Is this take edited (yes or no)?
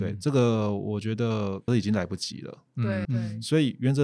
yes